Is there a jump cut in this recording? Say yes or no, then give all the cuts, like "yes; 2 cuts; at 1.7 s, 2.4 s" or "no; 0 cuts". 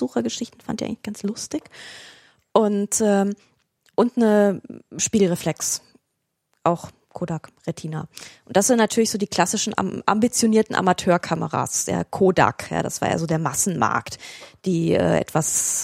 no; 0 cuts